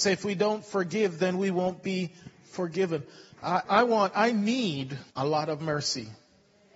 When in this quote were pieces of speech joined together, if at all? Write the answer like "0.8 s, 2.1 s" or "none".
3.7 s, 5.1 s